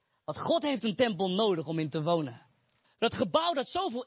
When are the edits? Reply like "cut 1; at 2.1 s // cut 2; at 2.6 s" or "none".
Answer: cut 1; at 2.8 s

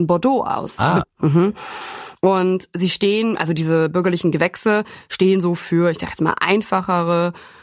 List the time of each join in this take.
cut 1; at 1.0 s

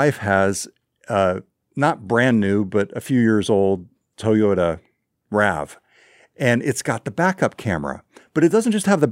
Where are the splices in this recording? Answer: none

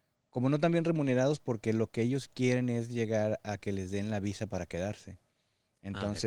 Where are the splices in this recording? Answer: none

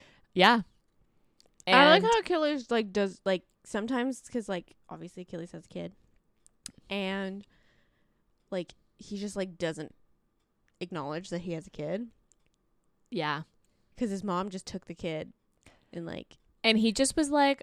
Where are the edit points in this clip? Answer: none

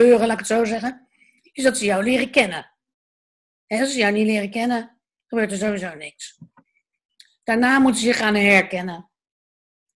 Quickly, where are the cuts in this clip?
none

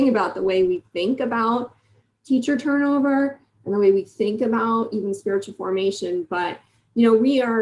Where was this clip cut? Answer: none

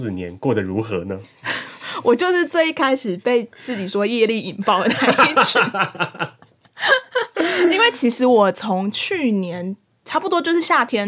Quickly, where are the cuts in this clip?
none

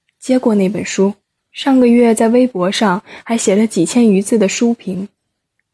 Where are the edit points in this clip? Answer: cut 1; at 1.4 s

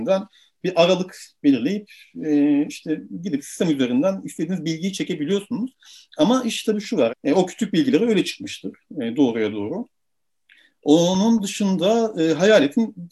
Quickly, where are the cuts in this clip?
cut 1; at 7.1 s

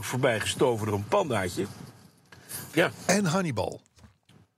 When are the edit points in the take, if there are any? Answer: cut 1; at 2.7 s

